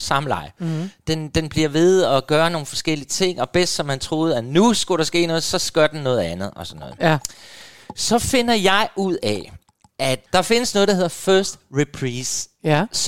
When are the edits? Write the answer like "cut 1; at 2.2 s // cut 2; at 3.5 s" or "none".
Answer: none